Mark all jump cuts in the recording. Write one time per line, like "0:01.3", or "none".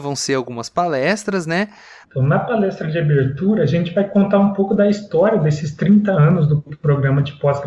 0:02.0